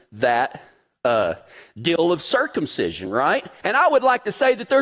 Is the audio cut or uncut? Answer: cut